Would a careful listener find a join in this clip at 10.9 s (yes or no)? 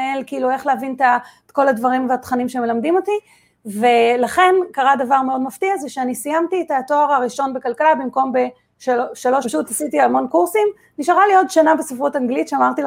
no